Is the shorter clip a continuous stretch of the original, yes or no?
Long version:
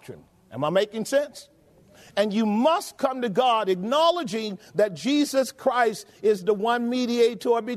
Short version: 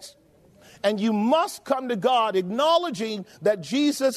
yes